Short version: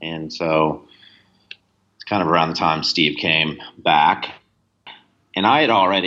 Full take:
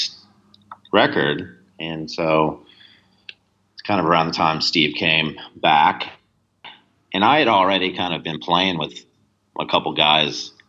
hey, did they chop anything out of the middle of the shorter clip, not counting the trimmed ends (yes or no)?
no